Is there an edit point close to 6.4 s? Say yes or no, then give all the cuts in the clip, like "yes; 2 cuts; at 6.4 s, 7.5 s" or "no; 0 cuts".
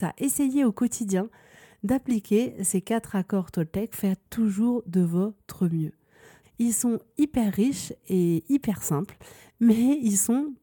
yes; 1 cut; at 6.4 s